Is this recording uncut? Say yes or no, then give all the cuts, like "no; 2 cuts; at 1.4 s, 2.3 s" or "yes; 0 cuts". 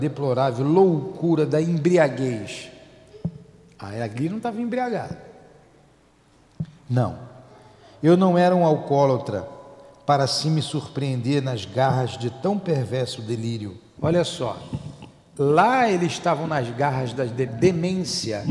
no; 2 cuts; at 14.0 s, 17.5 s